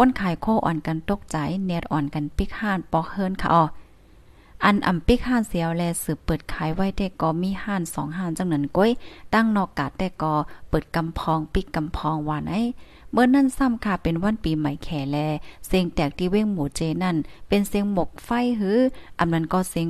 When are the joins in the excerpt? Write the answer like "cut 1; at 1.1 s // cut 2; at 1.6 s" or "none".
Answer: none